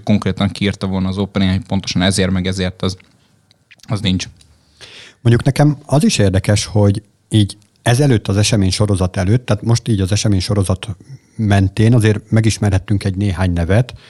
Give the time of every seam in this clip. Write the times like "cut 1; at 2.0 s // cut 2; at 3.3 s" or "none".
none